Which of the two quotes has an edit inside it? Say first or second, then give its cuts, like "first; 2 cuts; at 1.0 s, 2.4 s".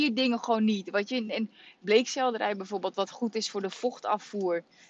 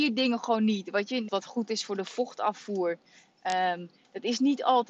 second; 1 cut; at 1.3 s